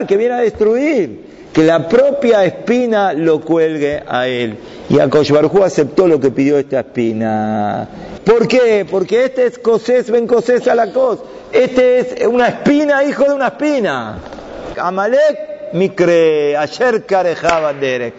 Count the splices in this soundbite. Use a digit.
2